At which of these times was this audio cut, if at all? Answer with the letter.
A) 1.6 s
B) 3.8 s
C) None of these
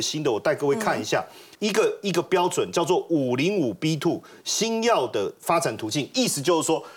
A